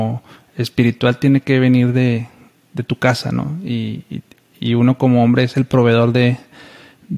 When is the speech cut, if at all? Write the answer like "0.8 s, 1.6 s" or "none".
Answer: none

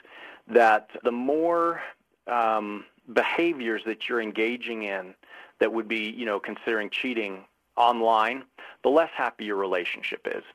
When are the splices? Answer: 1.0 s

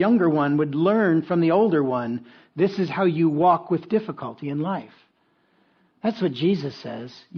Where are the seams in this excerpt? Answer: none

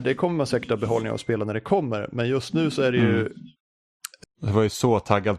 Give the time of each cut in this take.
4.2 s

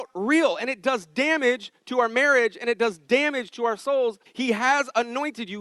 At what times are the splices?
4.3 s

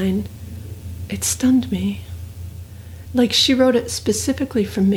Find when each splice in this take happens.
3.1 s

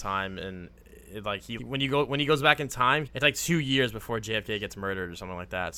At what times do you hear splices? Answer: 1.6 s, 3.1 s

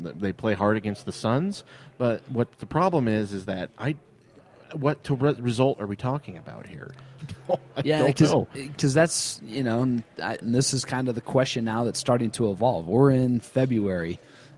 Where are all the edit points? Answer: 7.2 s, 10.4 s

